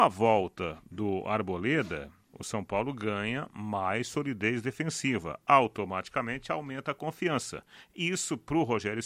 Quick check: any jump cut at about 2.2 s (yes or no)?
no